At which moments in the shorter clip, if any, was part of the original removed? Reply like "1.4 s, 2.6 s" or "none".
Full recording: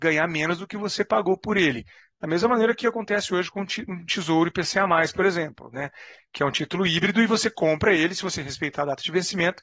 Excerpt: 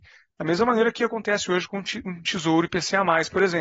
none